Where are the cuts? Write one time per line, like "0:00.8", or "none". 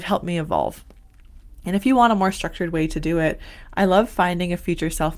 none